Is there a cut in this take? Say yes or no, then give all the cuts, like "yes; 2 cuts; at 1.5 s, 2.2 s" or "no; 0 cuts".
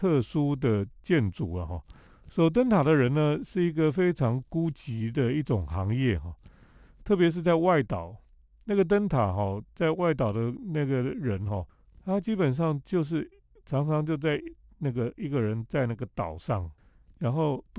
yes; 1 cut; at 2.1 s